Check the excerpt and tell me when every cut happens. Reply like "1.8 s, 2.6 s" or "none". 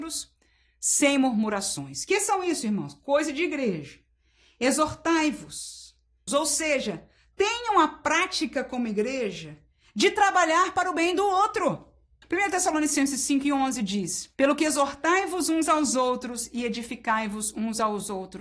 6.3 s, 12.2 s, 14.3 s